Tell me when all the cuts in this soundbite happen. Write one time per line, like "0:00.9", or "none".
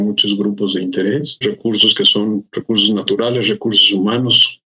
0:01.4